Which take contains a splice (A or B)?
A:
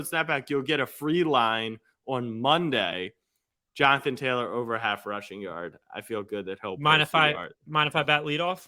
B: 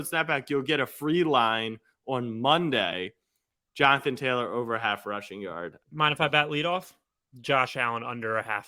B